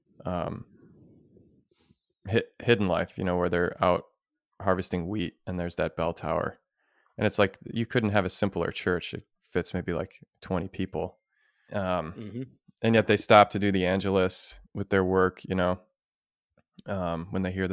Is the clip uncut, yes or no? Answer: no